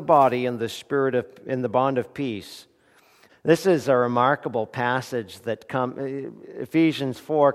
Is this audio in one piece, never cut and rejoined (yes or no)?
no